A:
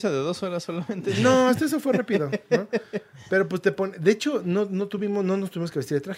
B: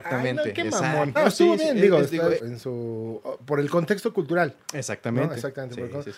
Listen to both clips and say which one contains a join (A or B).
B